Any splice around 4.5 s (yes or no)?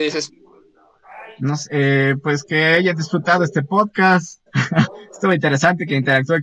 yes